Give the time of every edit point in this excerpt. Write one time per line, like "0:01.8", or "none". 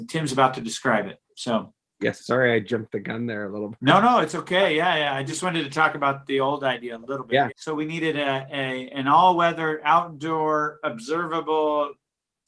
0:07.5